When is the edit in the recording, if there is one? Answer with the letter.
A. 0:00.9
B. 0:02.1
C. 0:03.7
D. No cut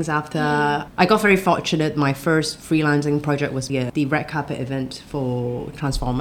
C